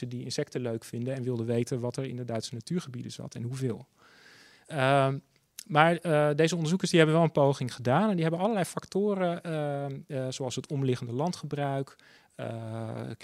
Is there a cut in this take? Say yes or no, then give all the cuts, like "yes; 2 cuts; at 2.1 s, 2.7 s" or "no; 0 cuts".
no; 0 cuts